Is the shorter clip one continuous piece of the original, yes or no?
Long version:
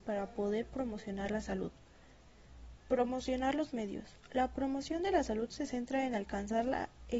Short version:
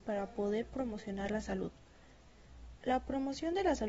no